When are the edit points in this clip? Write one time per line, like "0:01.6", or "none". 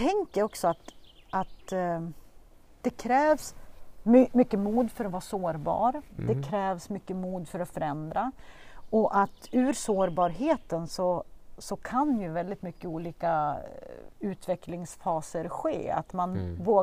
none